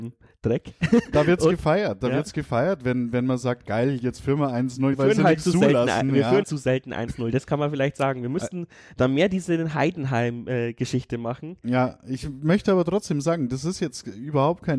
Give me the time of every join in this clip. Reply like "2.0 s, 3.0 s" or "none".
4.9 s, 6.4 s